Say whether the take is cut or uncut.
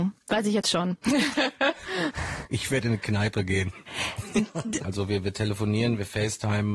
cut